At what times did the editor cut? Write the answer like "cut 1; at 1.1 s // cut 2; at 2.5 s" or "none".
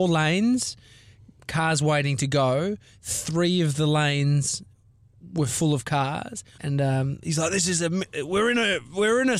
cut 1; at 6.6 s